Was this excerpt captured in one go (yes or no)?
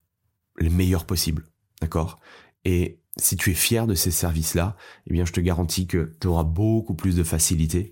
no